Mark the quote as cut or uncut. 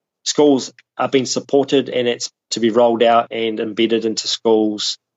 uncut